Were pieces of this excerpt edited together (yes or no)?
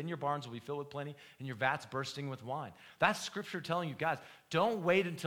no